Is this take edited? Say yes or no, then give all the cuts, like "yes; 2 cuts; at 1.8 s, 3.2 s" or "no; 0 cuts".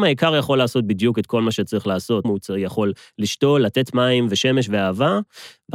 yes; 1 cut; at 2.2 s